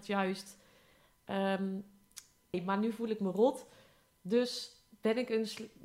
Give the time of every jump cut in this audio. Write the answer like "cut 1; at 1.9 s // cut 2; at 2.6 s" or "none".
cut 1; at 2.5 s